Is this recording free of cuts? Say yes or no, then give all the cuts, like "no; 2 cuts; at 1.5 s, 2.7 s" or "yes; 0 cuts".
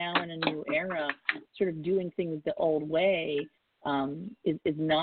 yes; 0 cuts